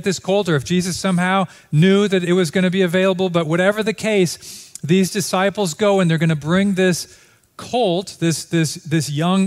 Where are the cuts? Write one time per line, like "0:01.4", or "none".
none